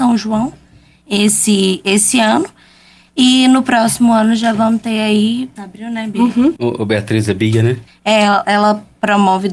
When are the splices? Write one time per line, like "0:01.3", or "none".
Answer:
0:05.6
0:06.6
0:07.9